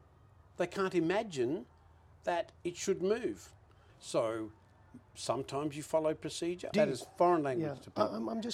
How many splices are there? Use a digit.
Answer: 2